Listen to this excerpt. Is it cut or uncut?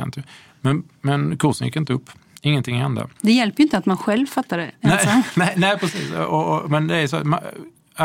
uncut